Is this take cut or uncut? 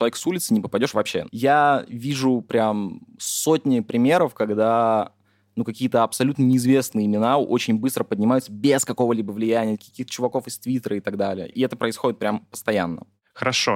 cut